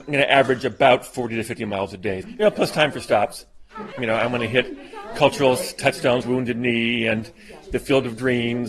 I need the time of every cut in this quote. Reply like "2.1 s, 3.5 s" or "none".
2.2 s, 3.9 s, 6.2 s